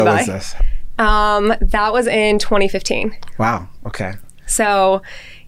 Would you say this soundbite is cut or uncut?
uncut